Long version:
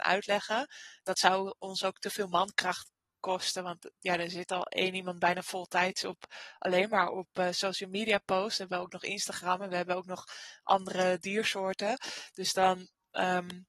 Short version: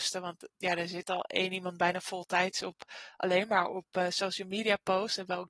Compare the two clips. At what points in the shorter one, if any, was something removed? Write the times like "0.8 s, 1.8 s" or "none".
none